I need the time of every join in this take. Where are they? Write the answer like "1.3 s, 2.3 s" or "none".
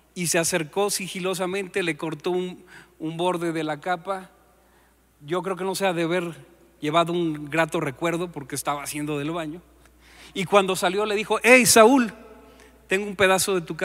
none